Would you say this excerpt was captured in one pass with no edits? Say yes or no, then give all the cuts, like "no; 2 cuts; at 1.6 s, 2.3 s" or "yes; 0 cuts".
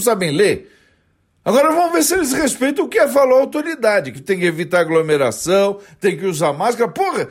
no; 1 cut; at 4.2 s